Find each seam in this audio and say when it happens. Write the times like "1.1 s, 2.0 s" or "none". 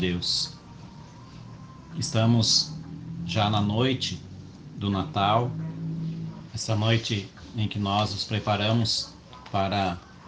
6.5 s